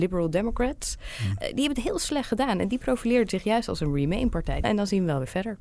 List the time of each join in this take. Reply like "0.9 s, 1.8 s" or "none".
4.6 s